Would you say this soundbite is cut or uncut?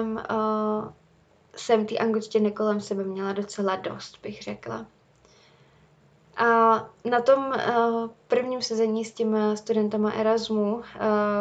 uncut